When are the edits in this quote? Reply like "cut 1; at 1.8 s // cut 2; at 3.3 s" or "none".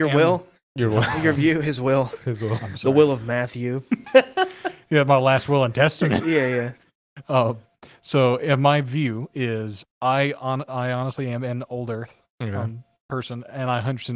cut 1; at 9.8 s